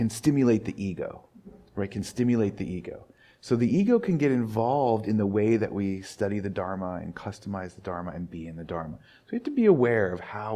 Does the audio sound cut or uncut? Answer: uncut